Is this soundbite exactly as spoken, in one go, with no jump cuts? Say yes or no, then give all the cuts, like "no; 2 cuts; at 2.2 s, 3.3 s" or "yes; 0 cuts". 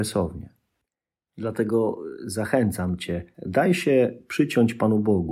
no; 1 cut; at 3.3 s